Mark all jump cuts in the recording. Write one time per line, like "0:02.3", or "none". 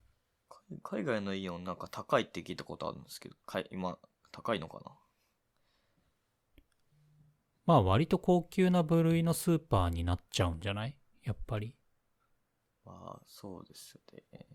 none